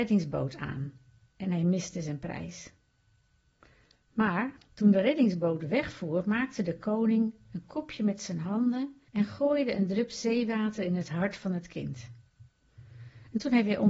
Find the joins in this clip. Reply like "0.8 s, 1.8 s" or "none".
4.6 s, 9.1 s